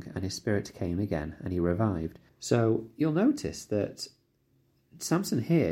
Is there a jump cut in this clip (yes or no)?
yes